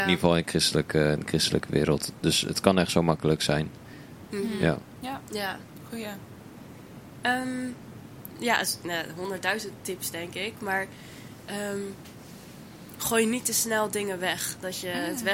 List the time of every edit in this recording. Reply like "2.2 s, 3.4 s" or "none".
none